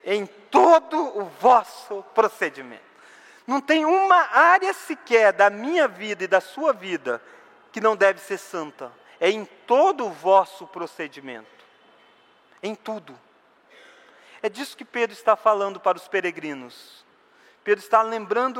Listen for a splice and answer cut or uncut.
uncut